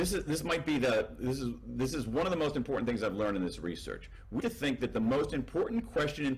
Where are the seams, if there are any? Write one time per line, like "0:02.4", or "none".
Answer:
0:04.4